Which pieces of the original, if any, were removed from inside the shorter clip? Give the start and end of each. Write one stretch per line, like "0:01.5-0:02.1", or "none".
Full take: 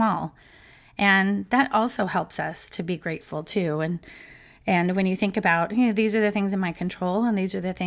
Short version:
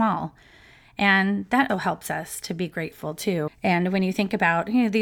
0:01.7-0:02.0
0:03.8-0:04.5